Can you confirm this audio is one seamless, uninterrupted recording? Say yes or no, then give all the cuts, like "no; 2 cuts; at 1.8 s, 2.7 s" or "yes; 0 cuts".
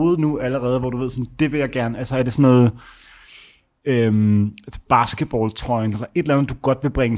yes; 0 cuts